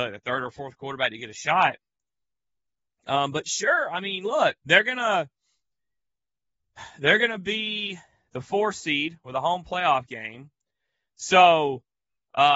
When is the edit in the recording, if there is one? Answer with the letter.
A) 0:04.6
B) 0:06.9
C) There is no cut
A